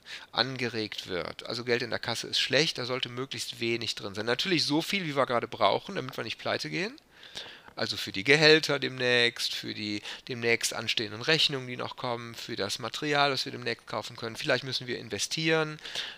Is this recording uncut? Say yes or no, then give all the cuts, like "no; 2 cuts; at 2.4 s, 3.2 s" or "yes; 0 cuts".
yes; 0 cuts